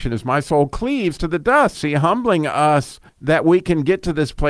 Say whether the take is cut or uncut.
cut